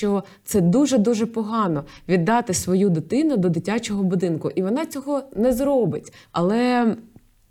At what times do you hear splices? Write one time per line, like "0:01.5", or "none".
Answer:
0:06.3